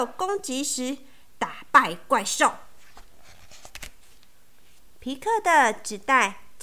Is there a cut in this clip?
no; 0 cuts

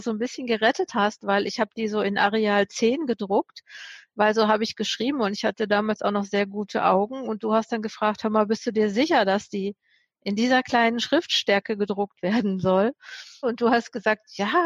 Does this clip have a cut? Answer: yes; 1 cut; at 13.4 s

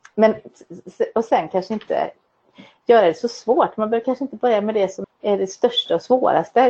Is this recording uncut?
no; 1 cut; at 5.0 s

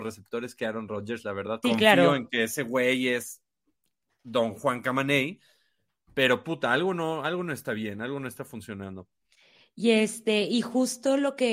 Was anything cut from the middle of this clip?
yes; 1 cut; at 1.6 s

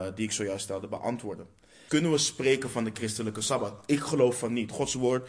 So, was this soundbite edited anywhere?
yes; 1 cut; at 1.9 s

